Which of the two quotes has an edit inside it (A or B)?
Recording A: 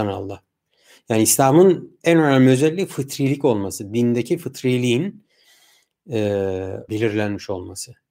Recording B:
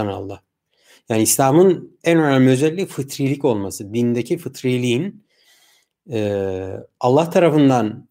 A